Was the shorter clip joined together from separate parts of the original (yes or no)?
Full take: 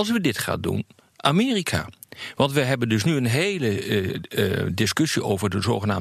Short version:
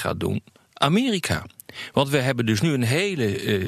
no